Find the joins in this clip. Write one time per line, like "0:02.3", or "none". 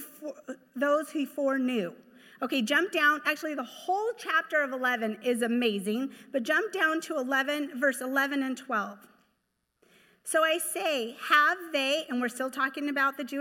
none